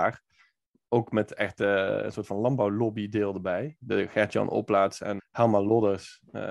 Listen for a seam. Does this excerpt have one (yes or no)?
yes